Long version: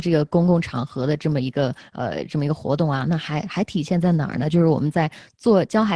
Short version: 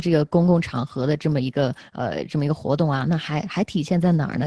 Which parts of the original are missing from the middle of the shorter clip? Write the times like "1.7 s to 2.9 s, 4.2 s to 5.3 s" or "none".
none